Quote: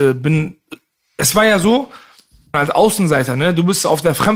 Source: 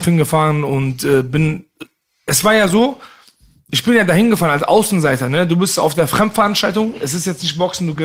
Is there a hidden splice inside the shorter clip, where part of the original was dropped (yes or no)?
yes